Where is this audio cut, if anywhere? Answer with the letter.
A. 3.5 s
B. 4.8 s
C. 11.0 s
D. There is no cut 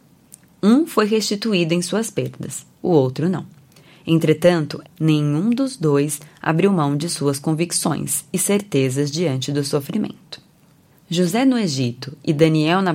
B